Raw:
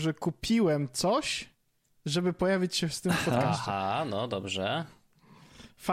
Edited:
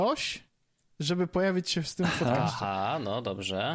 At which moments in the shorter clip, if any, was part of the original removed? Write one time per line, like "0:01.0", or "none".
none